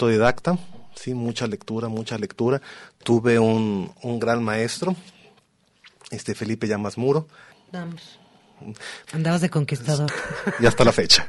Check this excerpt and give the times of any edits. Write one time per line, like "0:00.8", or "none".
0:07.5
0:09.1
0:10.1